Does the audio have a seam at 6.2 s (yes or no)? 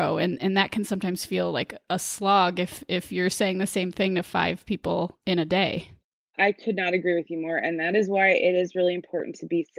no